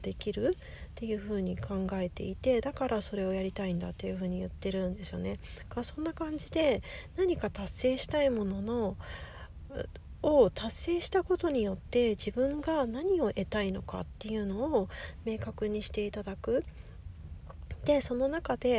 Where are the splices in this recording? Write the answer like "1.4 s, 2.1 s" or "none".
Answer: none

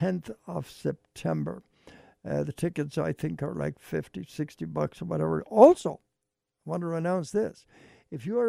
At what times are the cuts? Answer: none

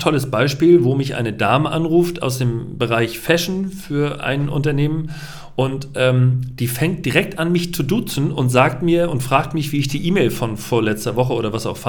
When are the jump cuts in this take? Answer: none

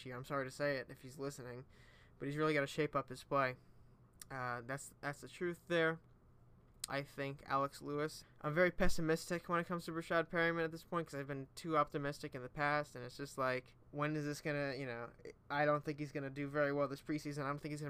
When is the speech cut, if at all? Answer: 6.9 s, 8.2 s, 13.8 s

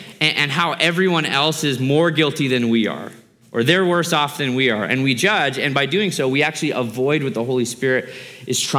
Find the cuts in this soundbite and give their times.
none

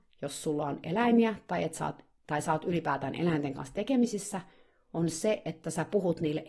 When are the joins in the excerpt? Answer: none

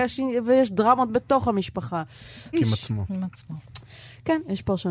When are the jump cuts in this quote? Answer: 2.5 s

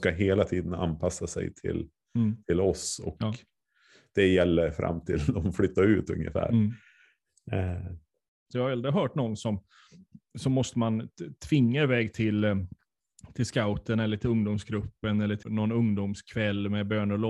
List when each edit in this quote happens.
8.5 s, 15.4 s

